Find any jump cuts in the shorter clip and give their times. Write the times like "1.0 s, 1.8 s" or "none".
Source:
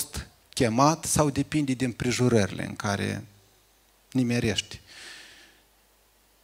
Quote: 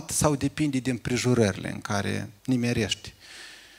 2.4 s